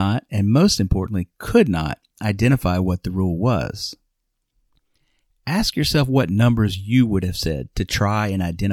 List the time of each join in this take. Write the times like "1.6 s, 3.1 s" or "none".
none

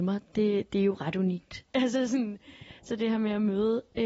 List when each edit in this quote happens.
1.7 s

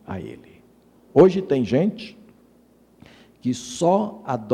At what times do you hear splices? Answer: 1.1 s

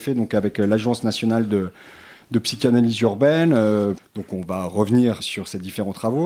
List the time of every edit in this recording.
4.0 s, 5.2 s

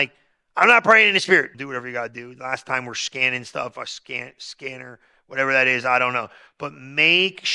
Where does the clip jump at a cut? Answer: 1.5 s

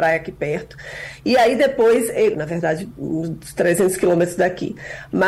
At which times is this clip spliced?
2.3 s

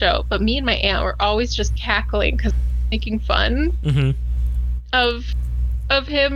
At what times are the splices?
none

